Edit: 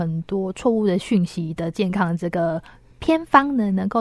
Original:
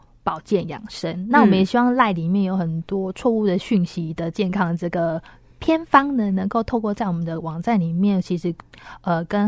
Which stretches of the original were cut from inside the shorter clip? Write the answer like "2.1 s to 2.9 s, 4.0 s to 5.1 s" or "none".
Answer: none